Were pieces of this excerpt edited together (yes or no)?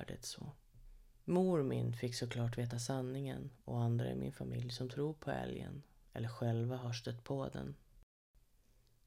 no